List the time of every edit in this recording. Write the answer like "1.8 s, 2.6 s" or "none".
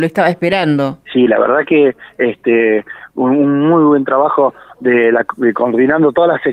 1.0 s